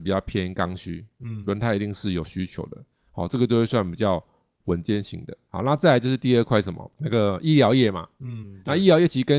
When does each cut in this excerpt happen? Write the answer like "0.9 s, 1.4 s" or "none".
none